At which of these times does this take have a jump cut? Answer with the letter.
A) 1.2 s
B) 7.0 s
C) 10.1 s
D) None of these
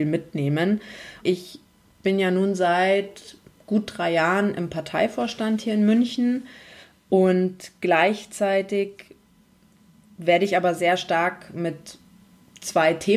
A